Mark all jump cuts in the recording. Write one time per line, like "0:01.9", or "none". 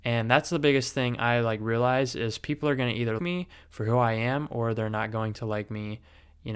0:03.2